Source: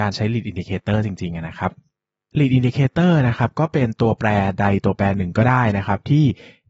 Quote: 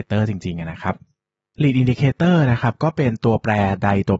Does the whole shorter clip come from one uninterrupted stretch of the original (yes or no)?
yes